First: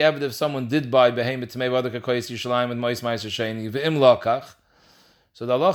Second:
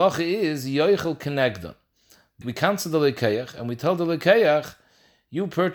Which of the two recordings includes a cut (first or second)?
second